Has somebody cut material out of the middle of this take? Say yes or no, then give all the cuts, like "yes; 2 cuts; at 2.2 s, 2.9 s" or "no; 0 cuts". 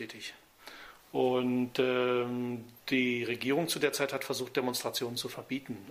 yes; 1 cut; at 1.0 s